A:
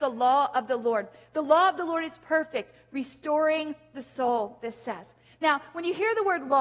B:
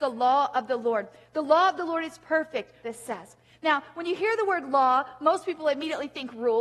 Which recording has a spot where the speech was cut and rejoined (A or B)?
B